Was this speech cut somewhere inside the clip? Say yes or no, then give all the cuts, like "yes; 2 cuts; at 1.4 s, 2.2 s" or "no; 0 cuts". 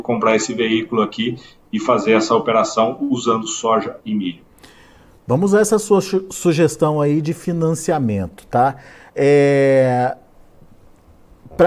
no; 0 cuts